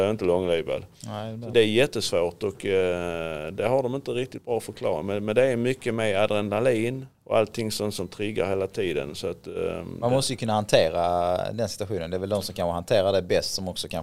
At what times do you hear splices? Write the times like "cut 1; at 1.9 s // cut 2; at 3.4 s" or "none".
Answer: cut 1; at 1.5 s // cut 2; at 7.1 s